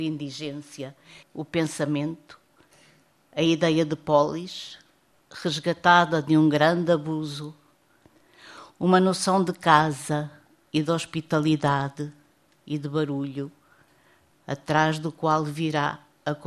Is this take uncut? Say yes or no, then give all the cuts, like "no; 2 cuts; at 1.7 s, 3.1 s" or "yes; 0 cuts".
no; 2 cuts; at 1.2 s, 14.3 s